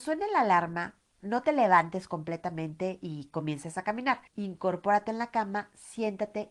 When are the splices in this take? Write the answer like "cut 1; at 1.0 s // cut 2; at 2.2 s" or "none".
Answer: cut 1; at 1.2 s // cut 2; at 4.3 s